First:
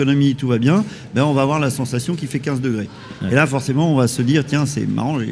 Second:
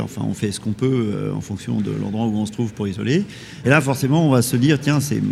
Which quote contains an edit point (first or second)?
second